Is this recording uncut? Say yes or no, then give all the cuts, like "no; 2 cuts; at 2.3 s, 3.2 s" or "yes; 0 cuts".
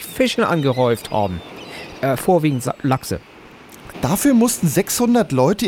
no; 1 cut; at 3.9 s